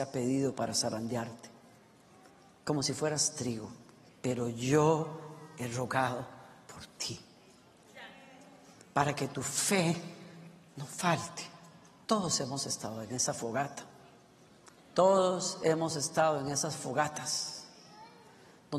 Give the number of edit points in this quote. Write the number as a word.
two